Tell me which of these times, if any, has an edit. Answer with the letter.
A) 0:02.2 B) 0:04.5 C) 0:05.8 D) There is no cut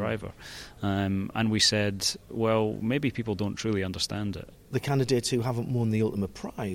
B